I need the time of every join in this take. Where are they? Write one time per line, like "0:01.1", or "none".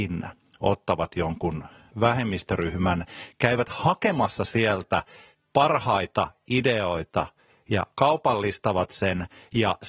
none

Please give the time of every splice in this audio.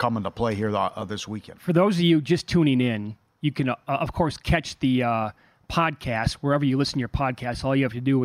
none

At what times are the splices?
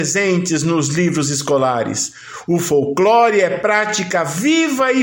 none

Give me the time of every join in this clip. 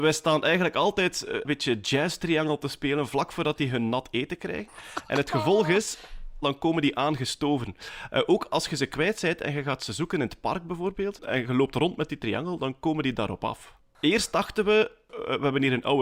0:06.4

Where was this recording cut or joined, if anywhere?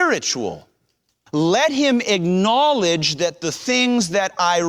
0:01.3

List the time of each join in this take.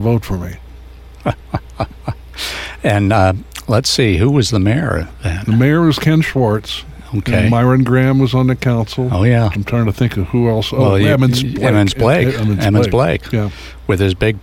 0:09.5

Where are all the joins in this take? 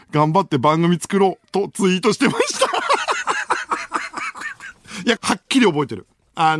0:05.2

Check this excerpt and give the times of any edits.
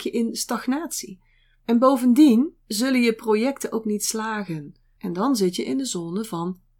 0:01.6
0:05.0

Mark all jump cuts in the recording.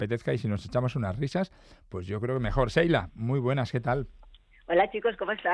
none

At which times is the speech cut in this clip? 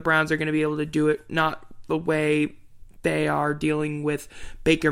none

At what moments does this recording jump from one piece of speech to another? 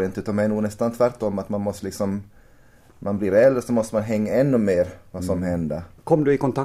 none

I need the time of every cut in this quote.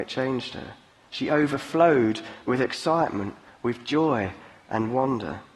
none

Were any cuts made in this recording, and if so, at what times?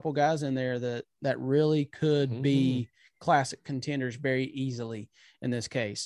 none

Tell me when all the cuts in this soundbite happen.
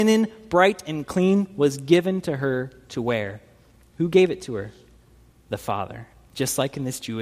none

